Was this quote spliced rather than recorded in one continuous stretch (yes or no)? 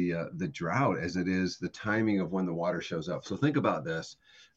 no